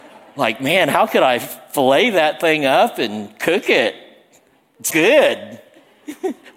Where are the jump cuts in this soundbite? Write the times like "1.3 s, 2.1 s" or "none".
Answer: 4.9 s